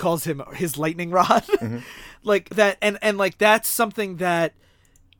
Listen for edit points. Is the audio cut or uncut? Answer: uncut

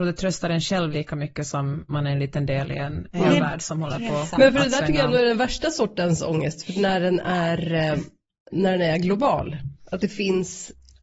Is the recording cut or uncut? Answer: uncut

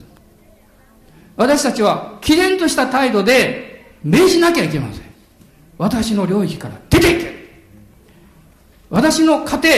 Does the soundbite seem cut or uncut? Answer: uncut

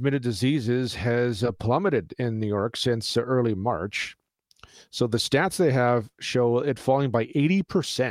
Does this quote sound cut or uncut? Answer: uncut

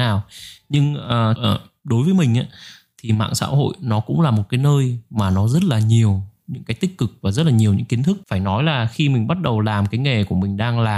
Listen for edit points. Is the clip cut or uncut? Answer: cut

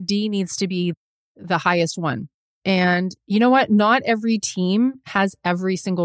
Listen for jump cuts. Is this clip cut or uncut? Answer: cut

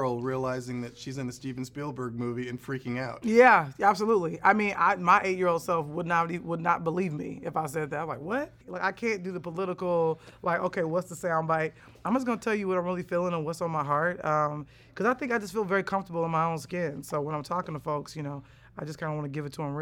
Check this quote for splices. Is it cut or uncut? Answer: cut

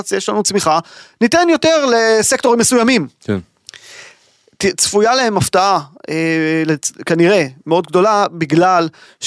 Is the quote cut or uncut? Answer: uncut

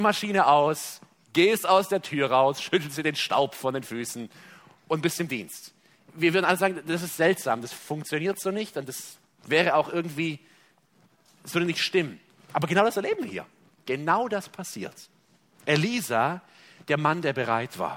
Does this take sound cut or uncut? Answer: uncut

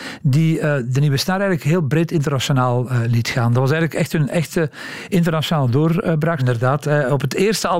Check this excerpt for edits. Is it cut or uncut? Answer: cut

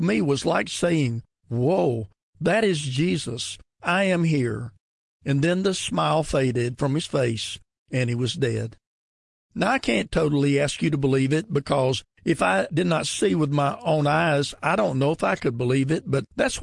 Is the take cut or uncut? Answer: uncut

